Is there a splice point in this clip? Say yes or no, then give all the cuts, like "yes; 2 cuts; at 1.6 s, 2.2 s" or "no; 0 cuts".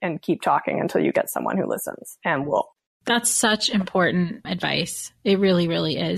no; 0 cuts